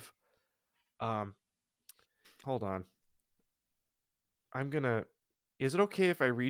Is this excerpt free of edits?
no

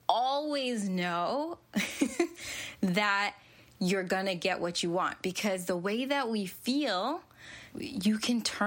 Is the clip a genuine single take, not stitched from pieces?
no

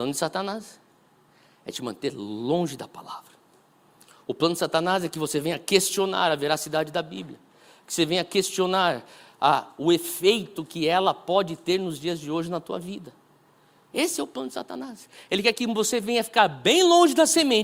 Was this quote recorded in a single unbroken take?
yes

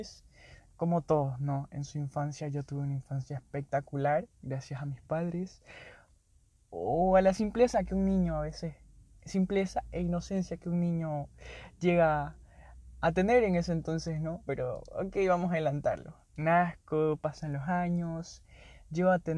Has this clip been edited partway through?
yes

